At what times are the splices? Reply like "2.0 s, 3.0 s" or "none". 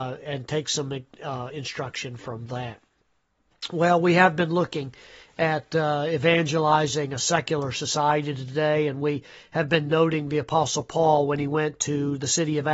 none

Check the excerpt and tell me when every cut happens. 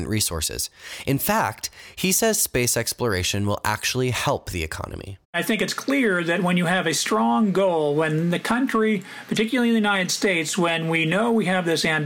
5.2 s

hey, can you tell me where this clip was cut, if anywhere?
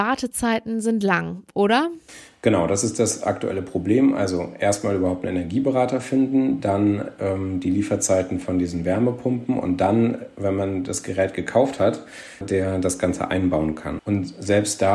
12.4 s, 14.0 s

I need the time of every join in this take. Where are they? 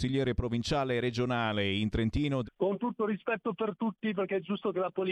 2.4 s

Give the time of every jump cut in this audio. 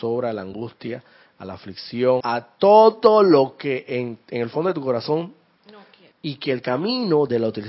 2.2 s, 6.1 s

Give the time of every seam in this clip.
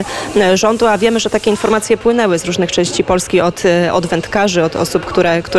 none

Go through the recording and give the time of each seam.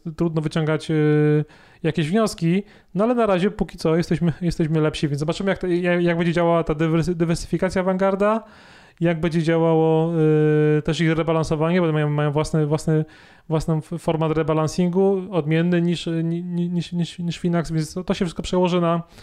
none

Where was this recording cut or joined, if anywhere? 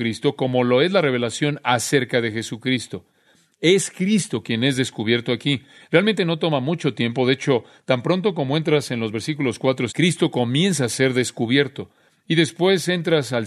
9.9 s

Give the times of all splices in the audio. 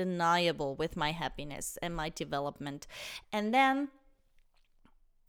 3.2 s

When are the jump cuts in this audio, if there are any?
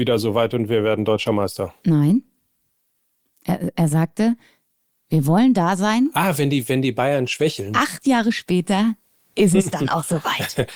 none

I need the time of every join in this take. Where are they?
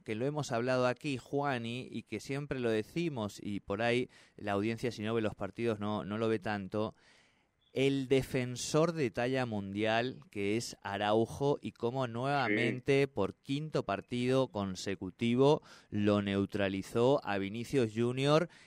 none

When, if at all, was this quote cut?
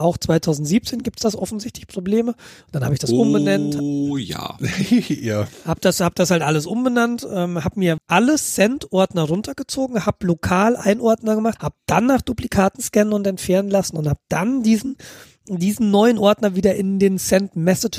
8.0 s, 11.6 s

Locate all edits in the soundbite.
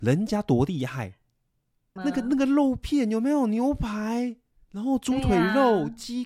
2.0 s

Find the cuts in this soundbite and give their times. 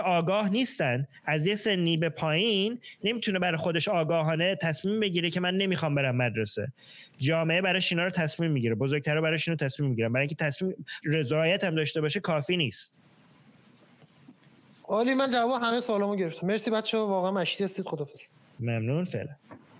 11.0 s

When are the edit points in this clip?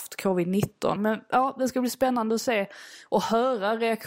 1.0 s

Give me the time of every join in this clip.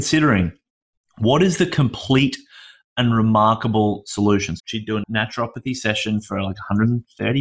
4.6 s

